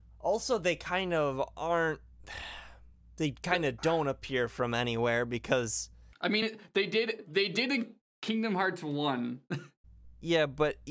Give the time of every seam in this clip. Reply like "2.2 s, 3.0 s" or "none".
none